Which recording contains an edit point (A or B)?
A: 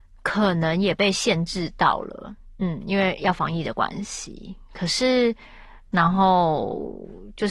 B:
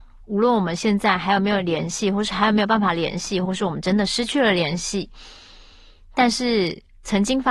A